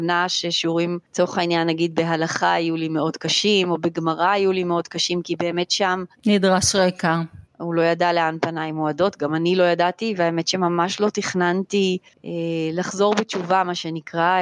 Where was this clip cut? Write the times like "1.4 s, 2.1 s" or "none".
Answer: 7.5 s